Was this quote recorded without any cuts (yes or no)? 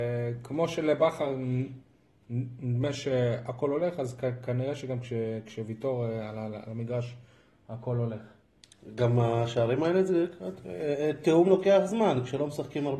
yes